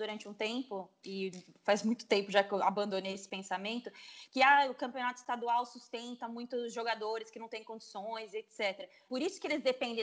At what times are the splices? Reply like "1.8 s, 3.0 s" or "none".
9.1 s